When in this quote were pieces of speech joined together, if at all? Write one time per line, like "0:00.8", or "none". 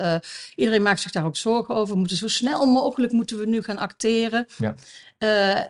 none